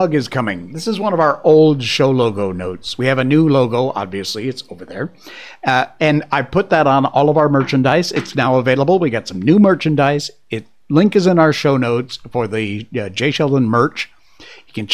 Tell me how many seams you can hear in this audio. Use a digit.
0